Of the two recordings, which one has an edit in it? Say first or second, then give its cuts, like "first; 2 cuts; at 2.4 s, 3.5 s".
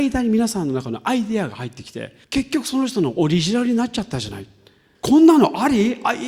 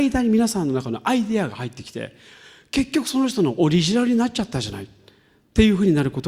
first; 2 cuts; at 2.2 s, 4.9 s